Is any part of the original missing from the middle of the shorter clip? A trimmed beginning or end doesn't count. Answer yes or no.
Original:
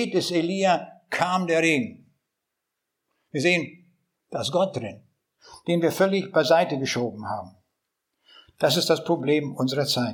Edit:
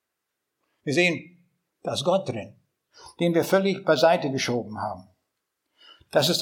no